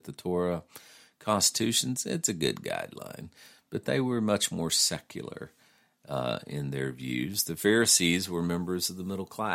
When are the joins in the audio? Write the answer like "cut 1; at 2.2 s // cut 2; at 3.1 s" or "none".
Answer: none